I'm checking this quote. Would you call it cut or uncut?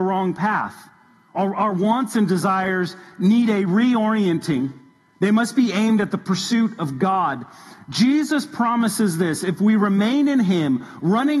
uncut